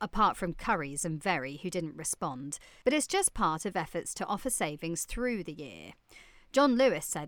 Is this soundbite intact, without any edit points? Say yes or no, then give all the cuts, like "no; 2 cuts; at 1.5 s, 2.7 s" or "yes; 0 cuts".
no; 1 cut; at 2.8 s